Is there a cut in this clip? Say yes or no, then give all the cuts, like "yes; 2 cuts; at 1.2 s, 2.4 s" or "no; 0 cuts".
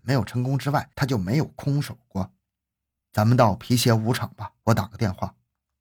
no; 0 cuts